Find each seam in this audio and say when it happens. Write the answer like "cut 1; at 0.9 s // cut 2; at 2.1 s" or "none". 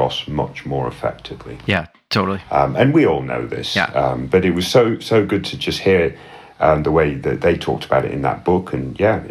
none